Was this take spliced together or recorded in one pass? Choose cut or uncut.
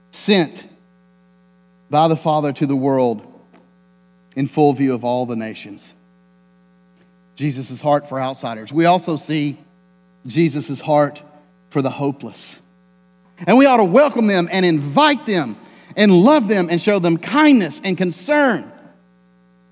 cut